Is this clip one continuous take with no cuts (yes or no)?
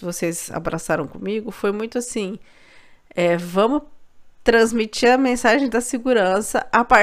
yes